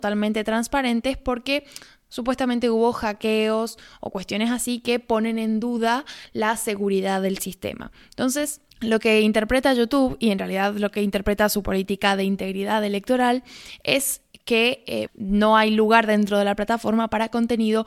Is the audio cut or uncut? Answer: cut